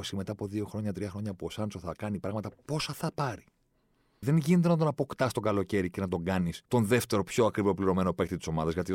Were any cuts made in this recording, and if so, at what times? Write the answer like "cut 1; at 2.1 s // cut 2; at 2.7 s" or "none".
cut 1; at 4.2 s // cut 2; at 6.7 s